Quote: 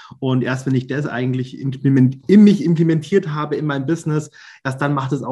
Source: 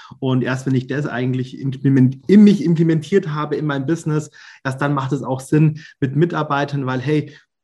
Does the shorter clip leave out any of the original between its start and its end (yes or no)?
no